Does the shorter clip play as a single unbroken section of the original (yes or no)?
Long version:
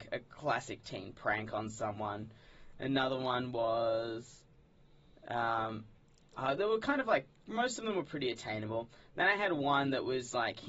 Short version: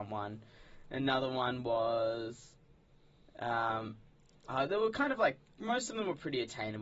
yes